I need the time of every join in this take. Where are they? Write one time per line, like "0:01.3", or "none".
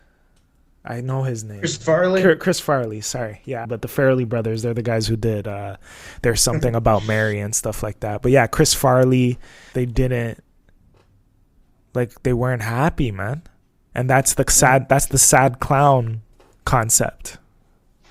0:03.6
0:09.7